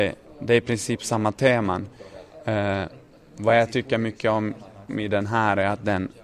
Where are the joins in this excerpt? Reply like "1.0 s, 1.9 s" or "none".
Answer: none